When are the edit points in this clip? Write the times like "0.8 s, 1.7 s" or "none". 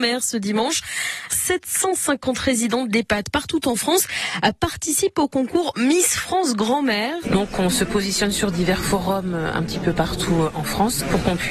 1.3 s, 7.2 s